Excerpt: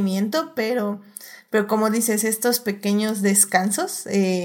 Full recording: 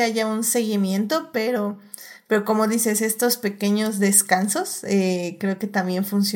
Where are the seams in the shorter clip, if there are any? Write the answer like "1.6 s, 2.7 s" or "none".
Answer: none